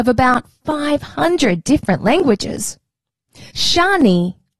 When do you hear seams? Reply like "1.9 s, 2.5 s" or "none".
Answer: 3.5 s